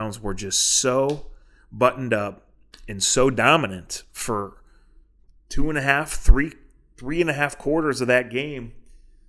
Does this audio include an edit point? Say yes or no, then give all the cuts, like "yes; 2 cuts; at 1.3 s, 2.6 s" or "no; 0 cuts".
no; 0 cuts